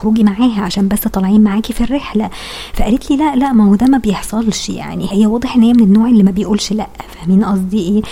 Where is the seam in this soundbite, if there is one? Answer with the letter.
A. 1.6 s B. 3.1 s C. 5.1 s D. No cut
C